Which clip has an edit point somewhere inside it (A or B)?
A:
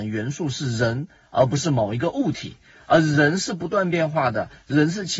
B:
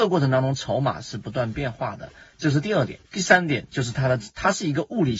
B